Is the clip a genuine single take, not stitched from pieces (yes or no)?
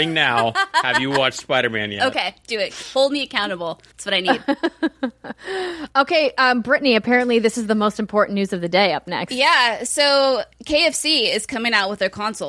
no